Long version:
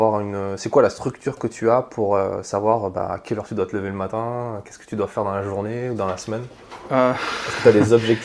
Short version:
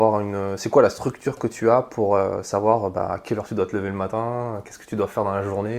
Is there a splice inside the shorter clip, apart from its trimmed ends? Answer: no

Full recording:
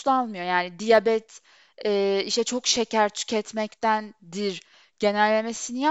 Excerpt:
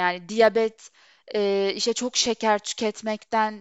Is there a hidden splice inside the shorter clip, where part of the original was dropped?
no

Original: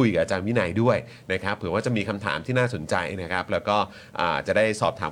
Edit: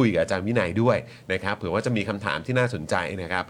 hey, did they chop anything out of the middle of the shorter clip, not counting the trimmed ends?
no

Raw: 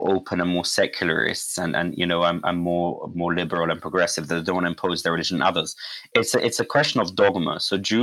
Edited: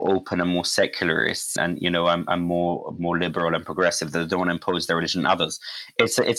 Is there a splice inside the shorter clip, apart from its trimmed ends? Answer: yes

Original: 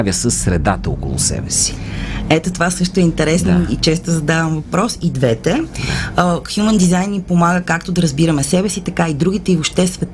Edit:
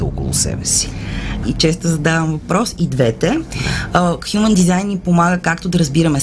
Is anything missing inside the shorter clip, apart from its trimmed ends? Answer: yes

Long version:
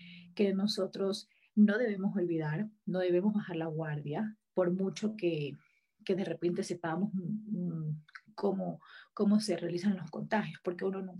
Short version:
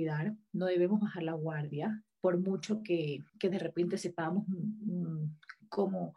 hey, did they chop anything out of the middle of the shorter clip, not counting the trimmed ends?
yes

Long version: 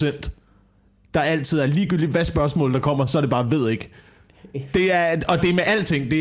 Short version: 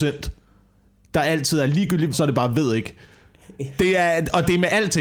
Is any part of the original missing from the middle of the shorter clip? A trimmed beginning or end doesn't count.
yes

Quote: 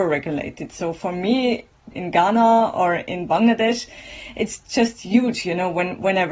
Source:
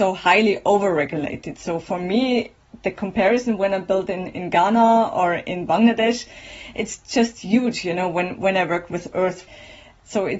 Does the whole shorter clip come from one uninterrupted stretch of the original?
no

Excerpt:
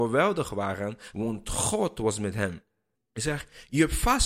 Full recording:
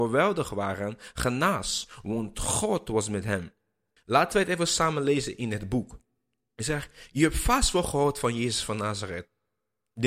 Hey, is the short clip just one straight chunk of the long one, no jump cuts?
no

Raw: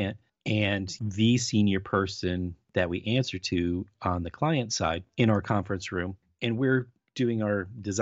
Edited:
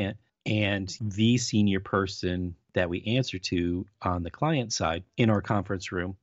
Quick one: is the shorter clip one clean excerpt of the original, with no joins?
yes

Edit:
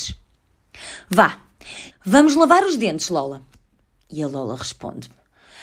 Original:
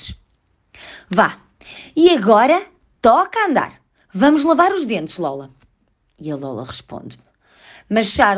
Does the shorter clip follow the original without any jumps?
no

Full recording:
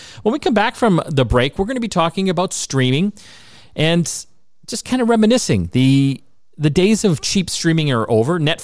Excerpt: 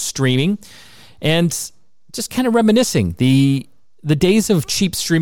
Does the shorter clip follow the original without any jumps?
yes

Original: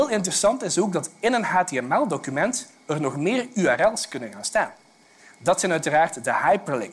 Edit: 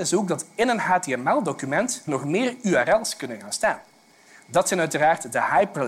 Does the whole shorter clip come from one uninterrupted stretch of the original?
no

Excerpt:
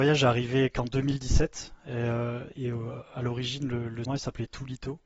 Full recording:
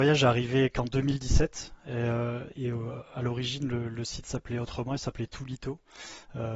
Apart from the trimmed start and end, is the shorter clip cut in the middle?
yes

